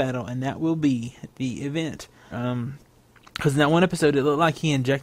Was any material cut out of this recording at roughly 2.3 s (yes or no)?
yes